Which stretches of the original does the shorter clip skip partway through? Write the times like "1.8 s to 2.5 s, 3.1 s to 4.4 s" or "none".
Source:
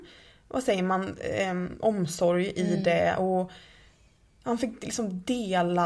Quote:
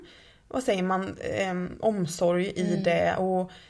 none